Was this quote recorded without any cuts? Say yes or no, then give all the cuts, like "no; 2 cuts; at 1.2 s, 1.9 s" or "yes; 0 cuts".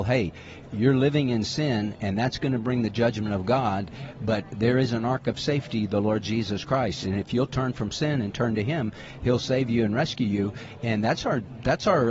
yes; 0 cuts